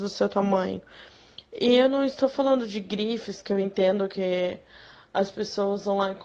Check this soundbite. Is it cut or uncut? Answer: uncut